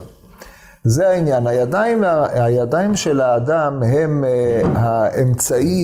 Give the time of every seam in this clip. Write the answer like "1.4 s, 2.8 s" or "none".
none